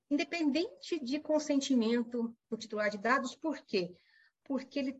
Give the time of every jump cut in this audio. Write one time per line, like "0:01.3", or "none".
0:02.4